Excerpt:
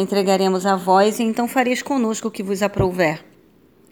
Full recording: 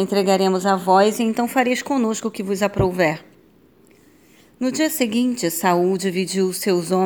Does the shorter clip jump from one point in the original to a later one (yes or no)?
no